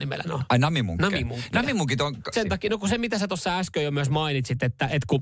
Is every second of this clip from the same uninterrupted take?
no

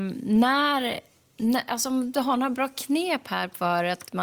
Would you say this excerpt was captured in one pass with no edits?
yes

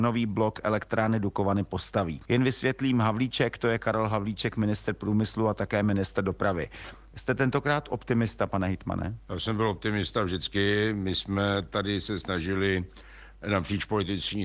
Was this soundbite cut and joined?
yes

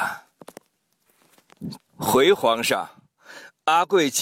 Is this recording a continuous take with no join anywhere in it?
no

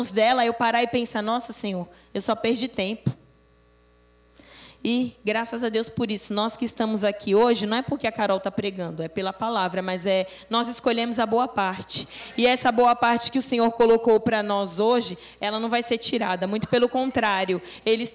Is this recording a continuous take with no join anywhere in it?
yes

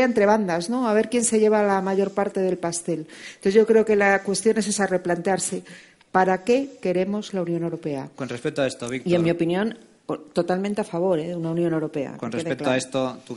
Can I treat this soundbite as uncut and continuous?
yes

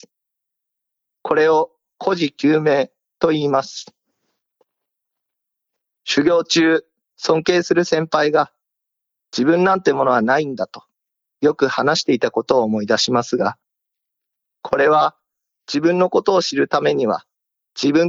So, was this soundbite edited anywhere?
no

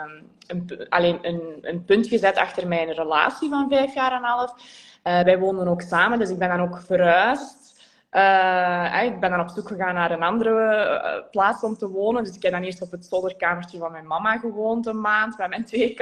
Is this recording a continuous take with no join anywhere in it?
yes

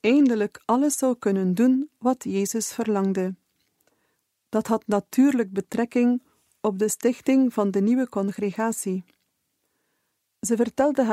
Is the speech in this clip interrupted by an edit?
no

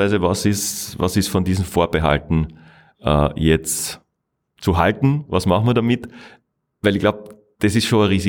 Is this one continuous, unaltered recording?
yes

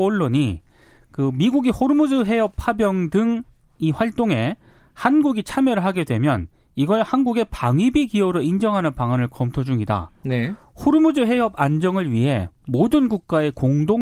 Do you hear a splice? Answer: yes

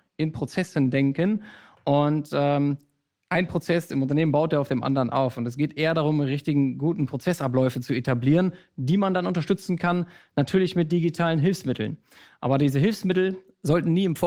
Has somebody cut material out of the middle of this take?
no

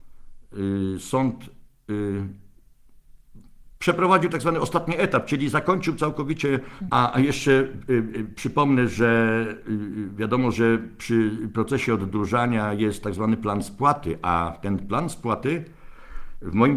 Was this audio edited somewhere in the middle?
yes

